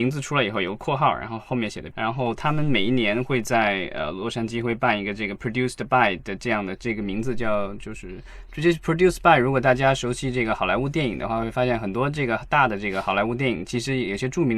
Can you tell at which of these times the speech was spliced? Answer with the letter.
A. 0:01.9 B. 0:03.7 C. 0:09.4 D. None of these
A